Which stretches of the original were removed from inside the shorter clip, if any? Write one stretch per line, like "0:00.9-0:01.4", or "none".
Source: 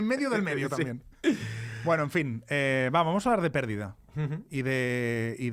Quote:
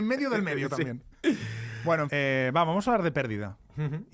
0:02.1-0:02.5